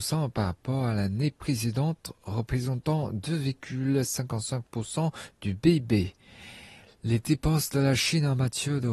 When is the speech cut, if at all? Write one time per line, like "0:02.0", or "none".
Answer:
0:06.9